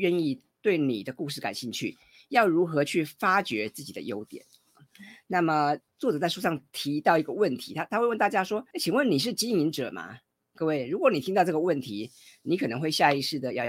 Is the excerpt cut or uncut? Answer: cut